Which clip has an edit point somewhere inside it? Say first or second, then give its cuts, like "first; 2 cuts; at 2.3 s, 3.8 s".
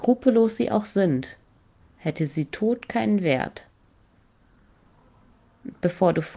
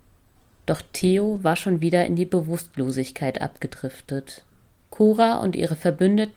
second; 1 cut; at 4.8 s